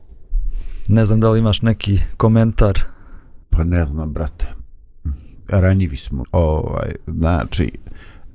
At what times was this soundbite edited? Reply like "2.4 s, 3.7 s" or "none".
3.4 s, 6.2 s

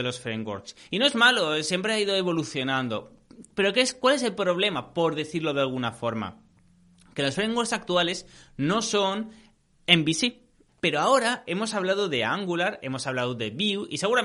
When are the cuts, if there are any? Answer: 10.7 s, 12.8 s

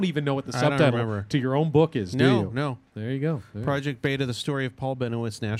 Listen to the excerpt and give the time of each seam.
none

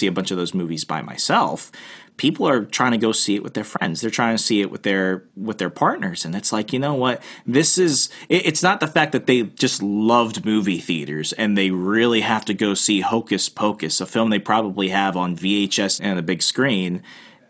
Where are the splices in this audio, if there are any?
16.0 s

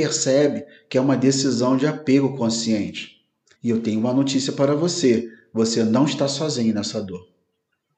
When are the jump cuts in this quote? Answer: 3.5 s

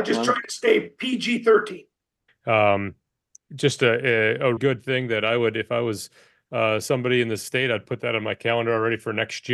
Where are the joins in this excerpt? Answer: 2.3 s, 4.6 s

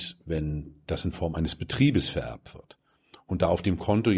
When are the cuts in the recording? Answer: none

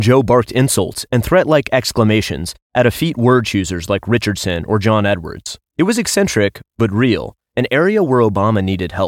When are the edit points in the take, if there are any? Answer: 5.7 s

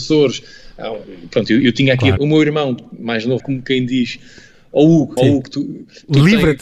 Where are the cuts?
2.2 s, 3.4 s, 5.2 s

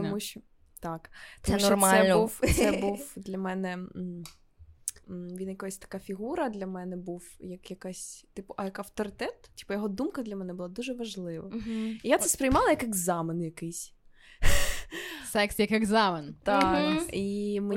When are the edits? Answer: 5.0 s

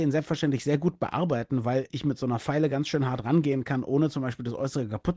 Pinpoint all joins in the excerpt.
none

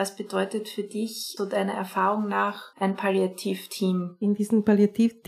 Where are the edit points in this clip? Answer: 1.4 s, 2.7 s

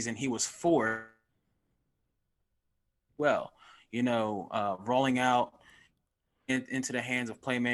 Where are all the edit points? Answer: 3.1 s

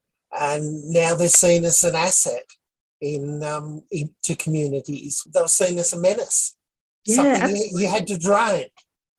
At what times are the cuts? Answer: 5.3 s

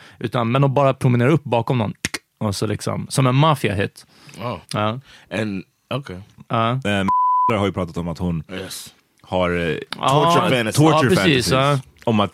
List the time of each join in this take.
4.6 s, 6.4 s

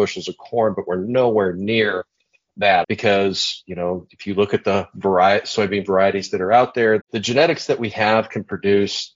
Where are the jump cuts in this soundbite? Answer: 2.8 s, 7.0 s

